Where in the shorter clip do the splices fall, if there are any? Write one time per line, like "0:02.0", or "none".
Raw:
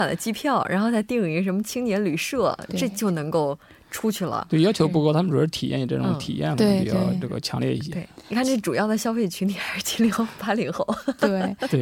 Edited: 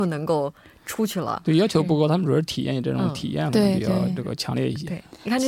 none